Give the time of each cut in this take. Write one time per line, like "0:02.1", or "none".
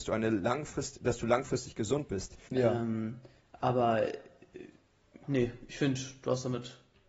0:02.5
0:05.2